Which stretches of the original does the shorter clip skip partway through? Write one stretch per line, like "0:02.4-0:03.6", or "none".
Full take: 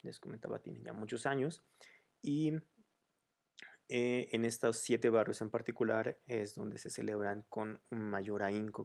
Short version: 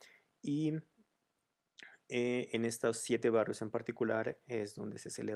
none